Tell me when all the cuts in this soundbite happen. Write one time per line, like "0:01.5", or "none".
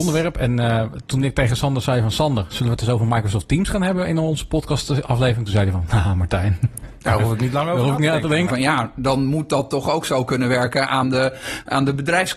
0:08.5